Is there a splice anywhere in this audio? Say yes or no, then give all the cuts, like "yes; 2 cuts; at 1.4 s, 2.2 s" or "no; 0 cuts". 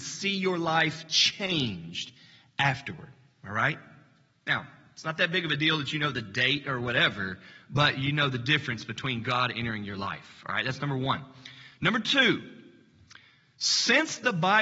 no; 0 cuts